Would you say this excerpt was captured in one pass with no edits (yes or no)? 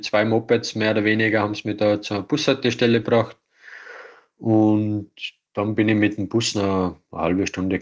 yes